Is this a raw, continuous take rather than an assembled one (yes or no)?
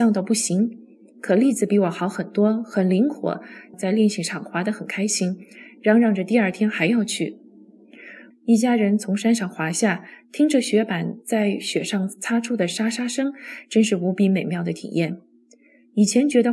no